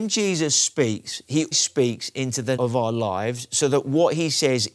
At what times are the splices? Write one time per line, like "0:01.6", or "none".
0:01.5
0:02.6